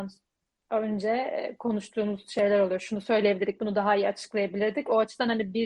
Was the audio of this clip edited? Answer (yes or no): no